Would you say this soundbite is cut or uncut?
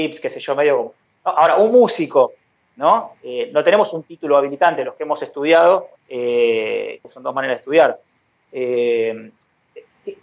cut